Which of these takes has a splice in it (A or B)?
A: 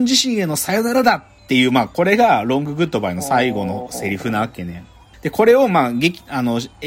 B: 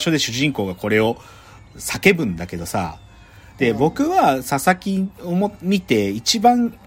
A